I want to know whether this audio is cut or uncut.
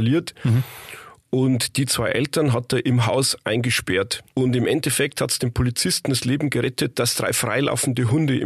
cut